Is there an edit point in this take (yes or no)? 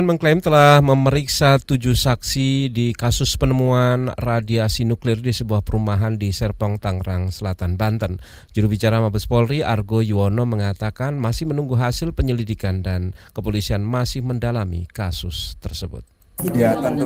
no